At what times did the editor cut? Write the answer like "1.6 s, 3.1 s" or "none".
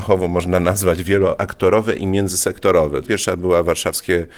3.0 s